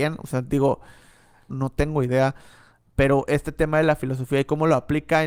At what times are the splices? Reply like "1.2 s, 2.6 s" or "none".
1.5 s